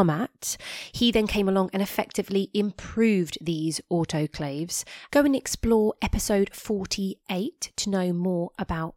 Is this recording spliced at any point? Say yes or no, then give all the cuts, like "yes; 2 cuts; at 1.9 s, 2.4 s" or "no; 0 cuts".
yes; 1 cut; at 5.1 s